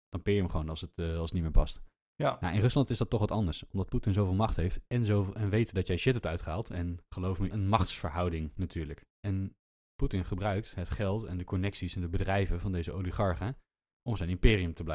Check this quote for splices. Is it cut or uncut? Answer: cut